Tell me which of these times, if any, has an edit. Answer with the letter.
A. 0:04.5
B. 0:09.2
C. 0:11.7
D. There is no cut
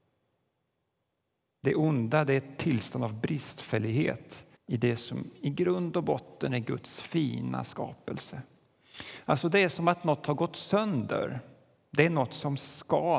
A